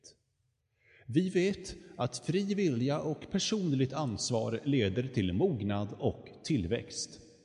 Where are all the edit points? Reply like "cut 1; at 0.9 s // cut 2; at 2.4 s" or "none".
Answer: none